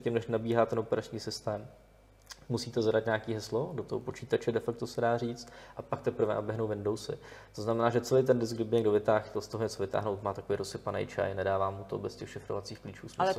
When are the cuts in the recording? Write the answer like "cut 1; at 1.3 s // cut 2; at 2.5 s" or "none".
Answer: none

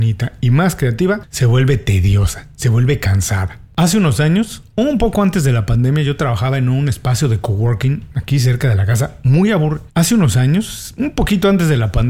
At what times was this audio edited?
cut 1; at 9.9 s

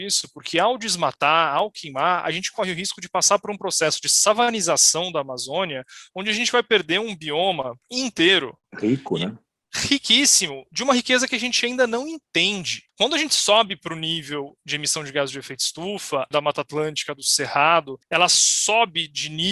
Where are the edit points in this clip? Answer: cut 1; at 12.9 s // cut 2; at 16.3 s

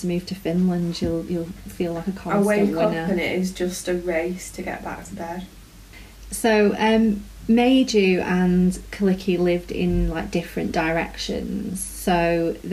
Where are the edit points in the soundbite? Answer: none

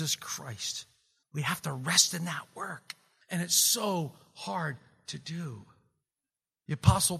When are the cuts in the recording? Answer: none

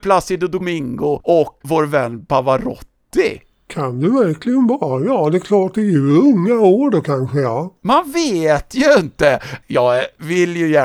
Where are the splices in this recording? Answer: cut 1; at 1.6 s

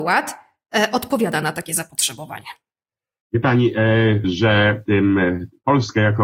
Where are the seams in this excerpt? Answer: cut 1; at 4.2 s

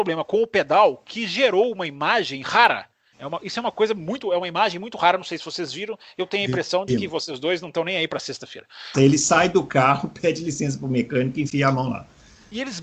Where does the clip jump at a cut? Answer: cut 1; at 3.1 s // cut 2; at 8.9 s

